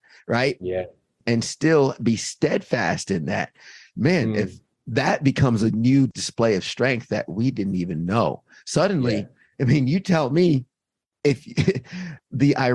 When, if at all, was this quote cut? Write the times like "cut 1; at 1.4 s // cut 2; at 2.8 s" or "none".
none